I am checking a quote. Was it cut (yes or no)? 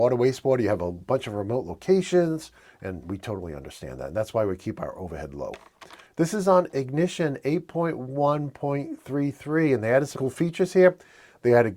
yes